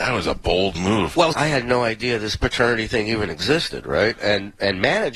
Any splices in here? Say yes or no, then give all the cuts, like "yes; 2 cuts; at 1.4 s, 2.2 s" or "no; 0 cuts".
yes; 1 cut; at 1.3 s